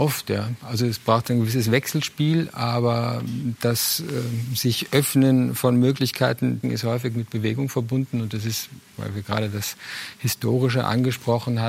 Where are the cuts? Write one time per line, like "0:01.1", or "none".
0:06.6